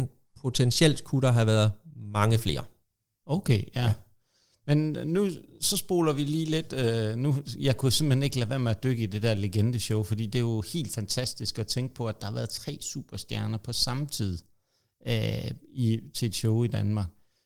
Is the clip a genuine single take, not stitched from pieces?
yes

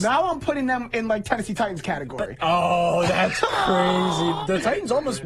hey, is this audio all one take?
yes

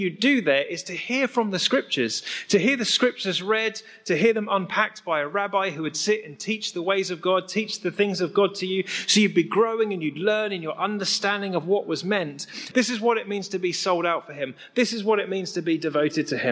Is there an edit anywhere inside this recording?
yes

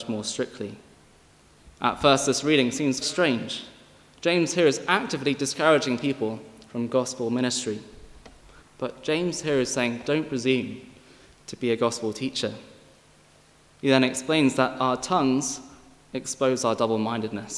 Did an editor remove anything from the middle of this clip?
yes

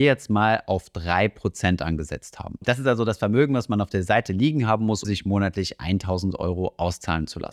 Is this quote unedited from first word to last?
no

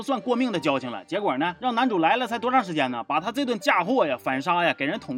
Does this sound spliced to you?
no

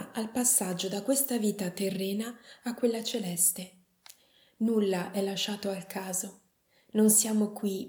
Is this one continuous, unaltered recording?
yes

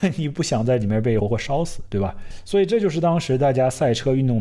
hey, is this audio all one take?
no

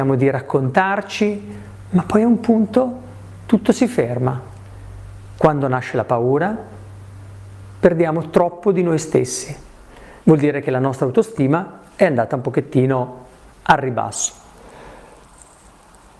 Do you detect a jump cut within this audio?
yes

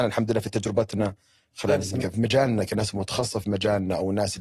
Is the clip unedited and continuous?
no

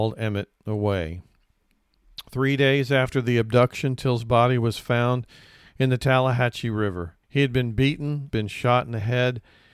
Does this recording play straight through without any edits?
no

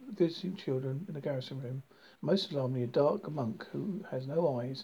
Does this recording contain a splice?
yes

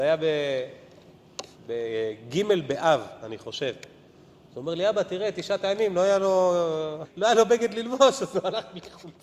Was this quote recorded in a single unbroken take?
no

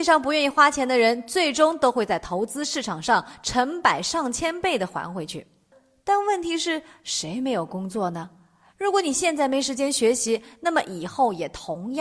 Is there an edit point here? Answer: yes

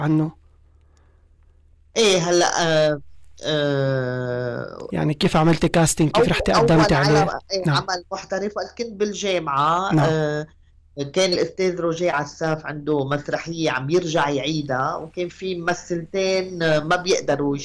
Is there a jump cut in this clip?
no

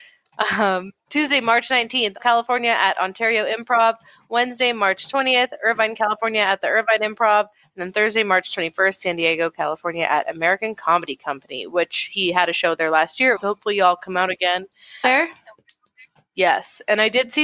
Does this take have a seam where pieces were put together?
yes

